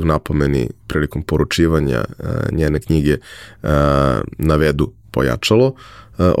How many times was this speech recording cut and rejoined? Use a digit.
0